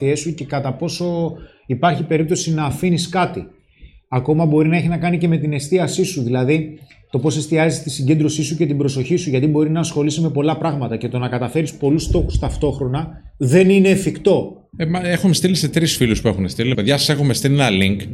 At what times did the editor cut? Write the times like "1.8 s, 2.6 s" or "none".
14.7 s, 16.7 s